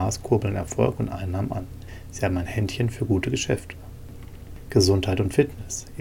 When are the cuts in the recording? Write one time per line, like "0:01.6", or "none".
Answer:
none